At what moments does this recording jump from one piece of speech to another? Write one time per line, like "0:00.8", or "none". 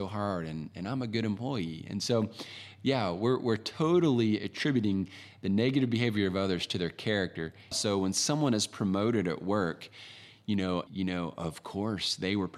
0:07.7
0:10.9